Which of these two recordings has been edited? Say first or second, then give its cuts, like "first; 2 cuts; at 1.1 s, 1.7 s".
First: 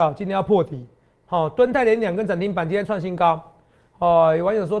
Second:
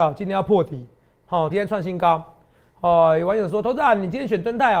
second; 1 cut; at 1.5 s